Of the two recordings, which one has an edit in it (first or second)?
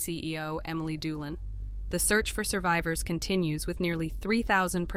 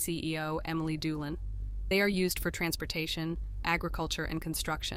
first